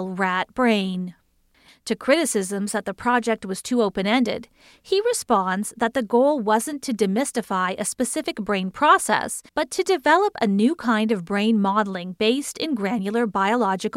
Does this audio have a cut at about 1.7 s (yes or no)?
yes